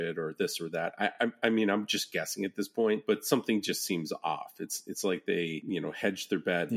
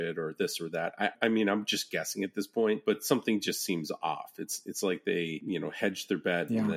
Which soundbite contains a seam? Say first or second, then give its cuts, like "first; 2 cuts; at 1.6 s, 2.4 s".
second; 1 cut; at 1.1 s